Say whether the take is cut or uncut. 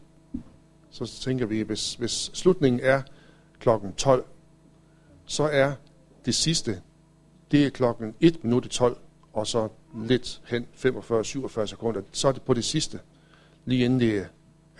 uncut